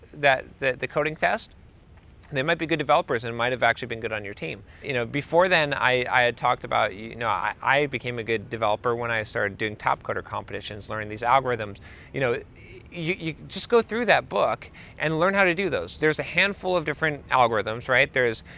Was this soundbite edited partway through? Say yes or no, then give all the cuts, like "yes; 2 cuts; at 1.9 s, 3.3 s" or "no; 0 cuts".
yes; 1 cut; at 4.8 s